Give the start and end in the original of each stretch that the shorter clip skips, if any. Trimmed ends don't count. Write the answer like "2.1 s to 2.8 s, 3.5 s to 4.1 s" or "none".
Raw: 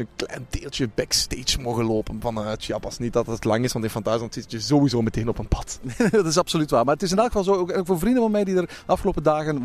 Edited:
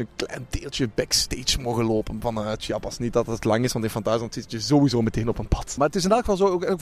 5.8 s to 6.8 s